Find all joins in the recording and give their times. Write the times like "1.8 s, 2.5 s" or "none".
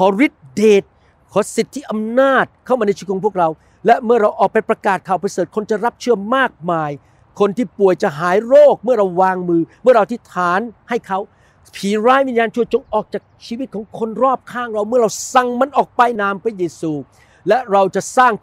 16.2 s